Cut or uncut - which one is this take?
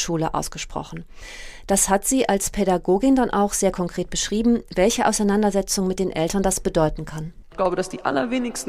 uncut